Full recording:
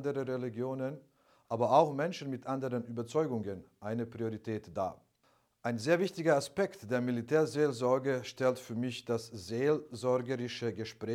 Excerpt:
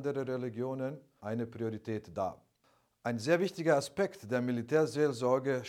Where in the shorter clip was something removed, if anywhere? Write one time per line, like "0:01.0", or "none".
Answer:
0:01.2